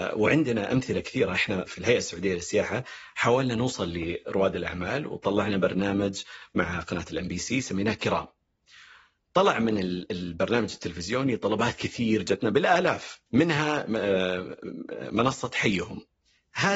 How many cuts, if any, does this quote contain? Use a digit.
2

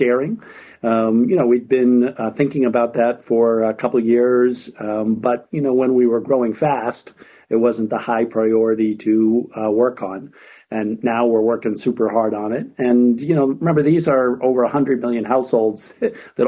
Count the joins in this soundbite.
0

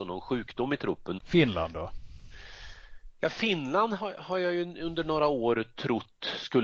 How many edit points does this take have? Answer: 1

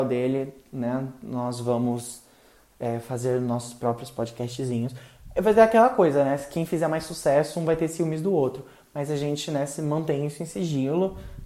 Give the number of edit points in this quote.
0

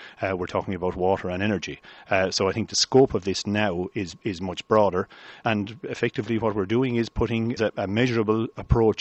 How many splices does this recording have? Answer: 2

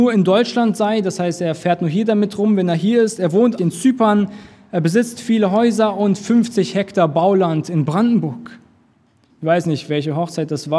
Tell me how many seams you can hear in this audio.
2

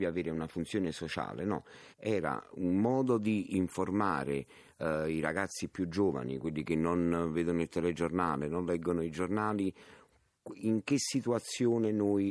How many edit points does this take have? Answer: 1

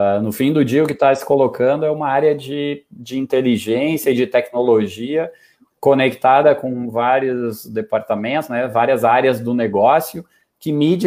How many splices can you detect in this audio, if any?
0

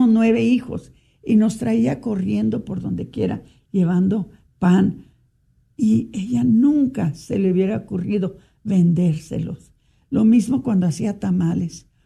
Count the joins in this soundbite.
0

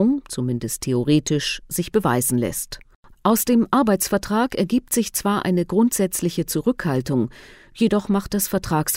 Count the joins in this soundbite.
1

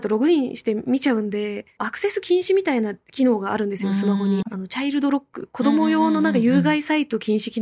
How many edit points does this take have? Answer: 1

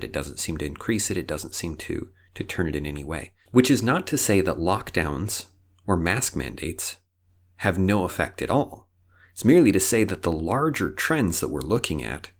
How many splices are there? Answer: 0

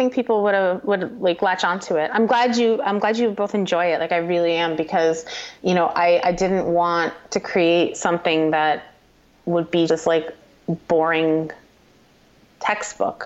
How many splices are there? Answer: 2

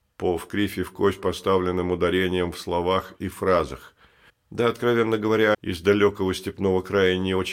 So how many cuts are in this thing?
2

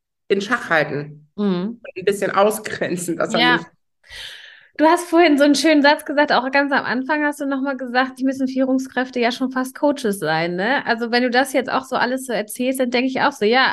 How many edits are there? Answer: 1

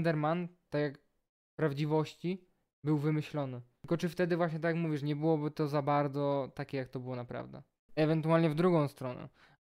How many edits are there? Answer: 1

